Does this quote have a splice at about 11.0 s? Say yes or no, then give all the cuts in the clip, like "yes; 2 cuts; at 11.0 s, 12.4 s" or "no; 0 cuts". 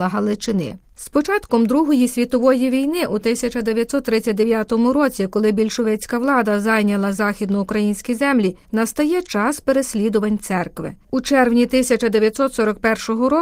no; 0 cuts